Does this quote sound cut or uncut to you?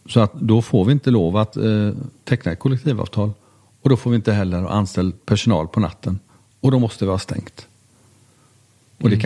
uncut